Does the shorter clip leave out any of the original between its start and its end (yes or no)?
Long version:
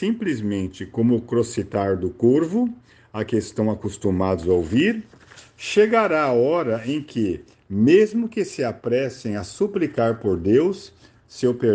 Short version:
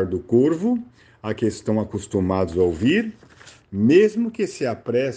yes